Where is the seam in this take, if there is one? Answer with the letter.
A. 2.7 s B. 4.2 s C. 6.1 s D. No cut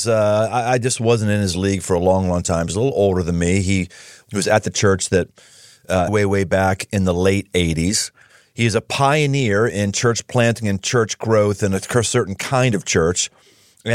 C